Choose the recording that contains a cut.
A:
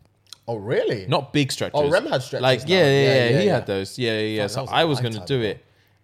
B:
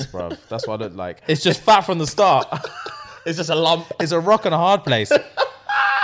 B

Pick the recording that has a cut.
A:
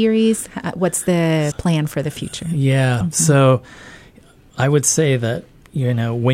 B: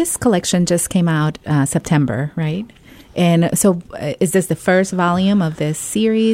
A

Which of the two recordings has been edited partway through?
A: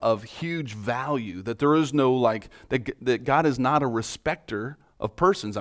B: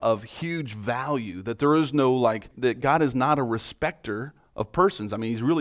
B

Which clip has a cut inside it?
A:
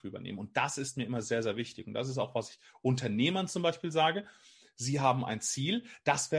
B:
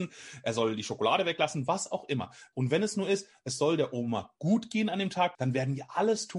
B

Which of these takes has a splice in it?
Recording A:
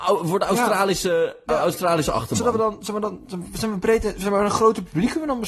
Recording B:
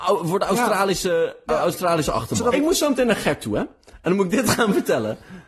B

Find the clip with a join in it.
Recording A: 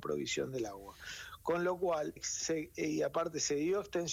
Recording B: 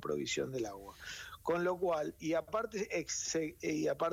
A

